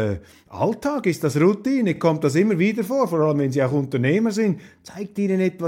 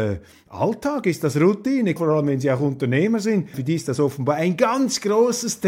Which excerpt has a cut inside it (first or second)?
second